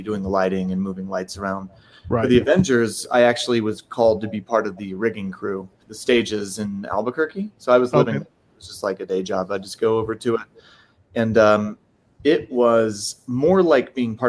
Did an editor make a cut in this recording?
yes; 1 cut; at 5.8 s

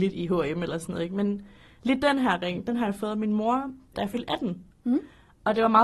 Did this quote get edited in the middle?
yes; 1 cut; at 3.9 s

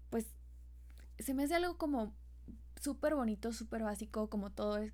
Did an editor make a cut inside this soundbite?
no; 0 cuts

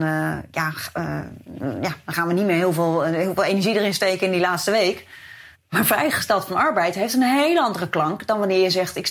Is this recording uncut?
no; 1 cut; at 5.5 s

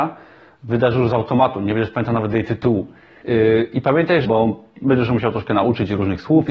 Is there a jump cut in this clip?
yes; 2 cuts; at 3.2 s, 4.2 s

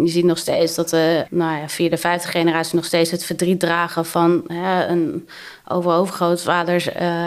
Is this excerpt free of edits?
no; 1 cut; at 1.3 s

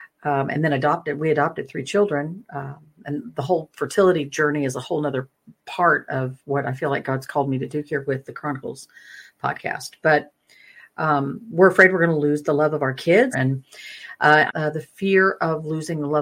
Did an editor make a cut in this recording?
yes; 2 cuts; at 13.3 s, 14.5 s

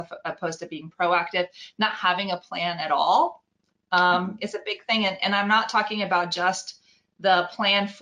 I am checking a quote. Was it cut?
no; 0 cuts

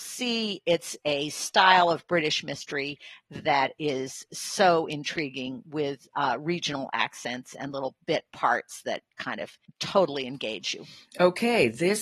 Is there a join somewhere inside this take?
no; 0 cuts

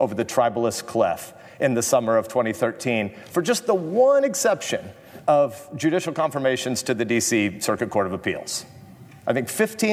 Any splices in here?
no; 0 cuts

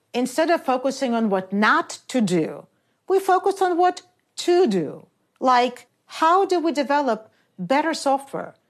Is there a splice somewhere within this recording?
no; 0 cuts

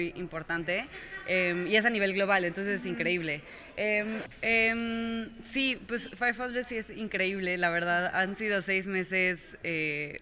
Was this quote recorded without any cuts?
no; 1 cut; at 4.2 s

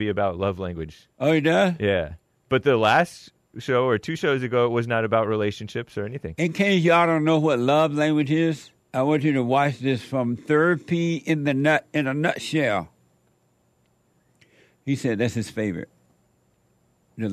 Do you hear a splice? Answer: yes; 1 cut; at 8.8 s

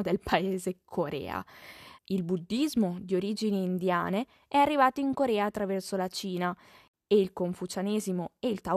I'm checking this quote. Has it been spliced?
yes; 1 cut; at 2.0 s

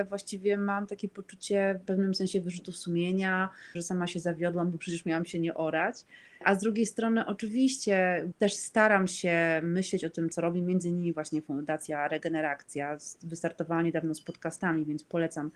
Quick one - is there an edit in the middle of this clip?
yes; 2 cuts; at 1.8 s, 3.7 s

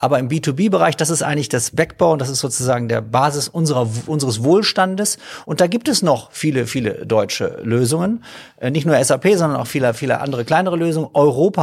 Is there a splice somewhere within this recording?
no; 0 cuts

